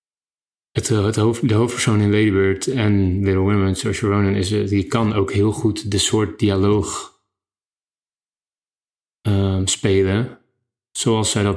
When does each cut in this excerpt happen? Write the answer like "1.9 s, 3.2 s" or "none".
none